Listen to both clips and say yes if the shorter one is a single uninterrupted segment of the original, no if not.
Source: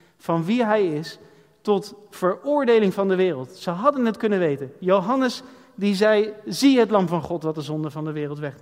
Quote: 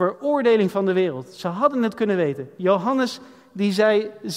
yes